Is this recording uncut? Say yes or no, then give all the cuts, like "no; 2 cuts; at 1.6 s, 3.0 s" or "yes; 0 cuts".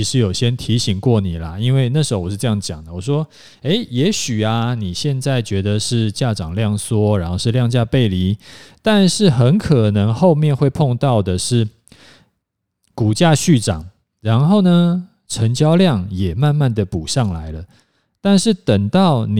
yes; 0 cuts